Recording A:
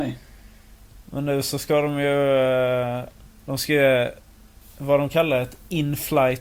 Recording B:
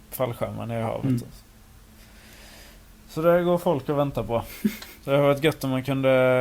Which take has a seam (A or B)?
A